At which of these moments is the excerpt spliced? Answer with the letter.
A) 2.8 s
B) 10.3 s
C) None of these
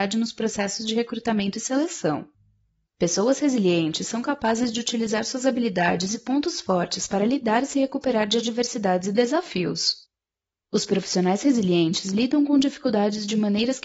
A